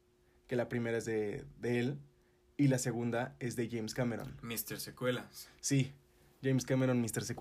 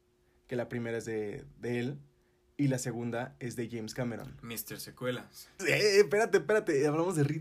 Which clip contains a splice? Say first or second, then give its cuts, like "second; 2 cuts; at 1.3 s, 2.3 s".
second; 1 cut; at 5.6 s